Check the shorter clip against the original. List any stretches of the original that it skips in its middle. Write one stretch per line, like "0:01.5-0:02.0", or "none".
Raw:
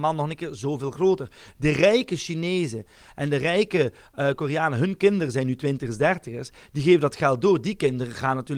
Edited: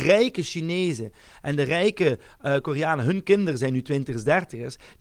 none